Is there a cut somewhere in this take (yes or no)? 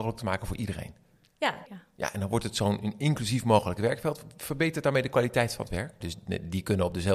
yes